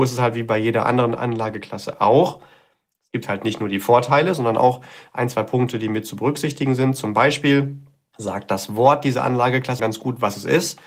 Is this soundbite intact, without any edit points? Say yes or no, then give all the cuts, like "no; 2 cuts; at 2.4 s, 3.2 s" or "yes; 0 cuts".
no; 1 cut; at 9.8 s